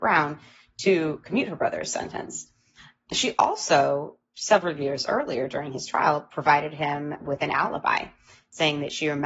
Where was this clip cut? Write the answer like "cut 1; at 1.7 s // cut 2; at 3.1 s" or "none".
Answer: none